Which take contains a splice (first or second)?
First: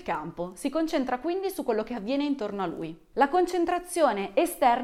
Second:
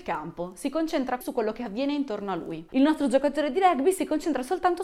second